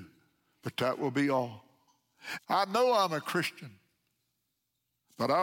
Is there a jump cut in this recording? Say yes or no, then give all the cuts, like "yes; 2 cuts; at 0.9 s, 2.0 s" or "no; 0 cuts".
yes; 1 cut; at 2.4 s